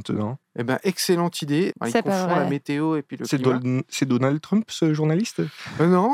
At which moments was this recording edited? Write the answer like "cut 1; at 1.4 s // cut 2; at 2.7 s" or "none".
cut 1; at 1.7 s